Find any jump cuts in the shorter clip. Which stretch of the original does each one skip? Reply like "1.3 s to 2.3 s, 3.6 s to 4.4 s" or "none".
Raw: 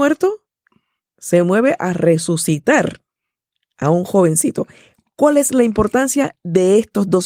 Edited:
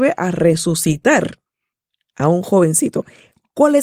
none

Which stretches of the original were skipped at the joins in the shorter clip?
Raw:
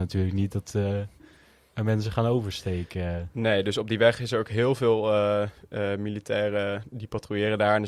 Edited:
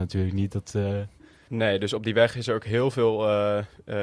1.5 s to 3.3 s

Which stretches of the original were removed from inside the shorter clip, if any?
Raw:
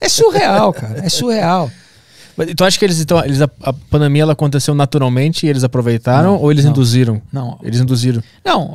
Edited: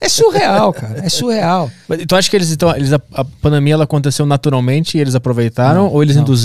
1.8 s to 2.3 s

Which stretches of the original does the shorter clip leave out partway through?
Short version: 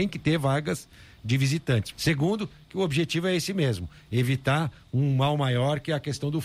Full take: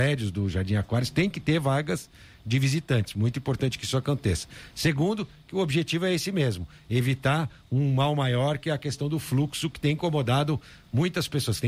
3.1 s to 4.7 s

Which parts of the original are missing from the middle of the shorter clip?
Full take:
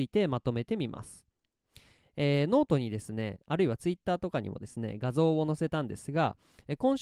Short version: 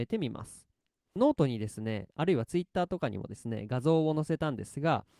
1.7 s to 2.5 s

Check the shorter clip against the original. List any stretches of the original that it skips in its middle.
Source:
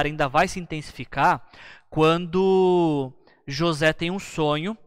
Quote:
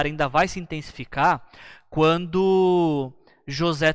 none

